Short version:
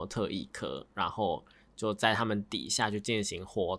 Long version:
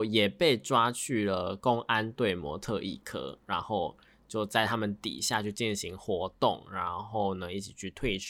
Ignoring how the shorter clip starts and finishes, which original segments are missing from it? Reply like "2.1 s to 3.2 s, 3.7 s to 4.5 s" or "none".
none